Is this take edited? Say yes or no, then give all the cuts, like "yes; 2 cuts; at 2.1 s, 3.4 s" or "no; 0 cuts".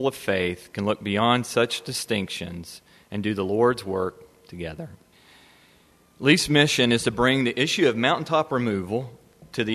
no; 0 cuts